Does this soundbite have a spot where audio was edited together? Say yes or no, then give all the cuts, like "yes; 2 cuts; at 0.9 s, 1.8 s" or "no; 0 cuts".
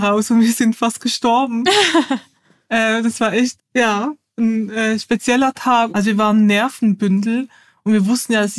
yes; 2 cuts; at 3.6 s, 5.9 s